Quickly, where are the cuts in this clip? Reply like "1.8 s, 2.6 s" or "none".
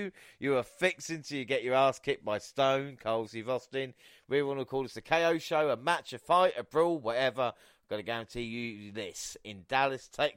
none